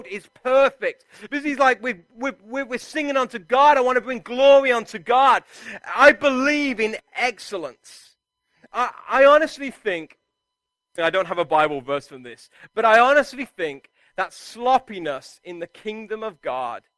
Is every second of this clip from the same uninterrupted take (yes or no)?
no